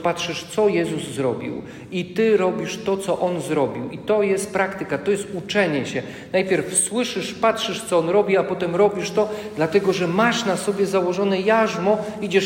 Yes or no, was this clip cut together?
no